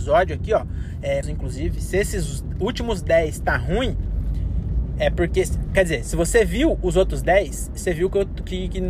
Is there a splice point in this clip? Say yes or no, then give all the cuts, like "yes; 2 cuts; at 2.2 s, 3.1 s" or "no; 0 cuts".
yes; 1 cut; at 1.2 s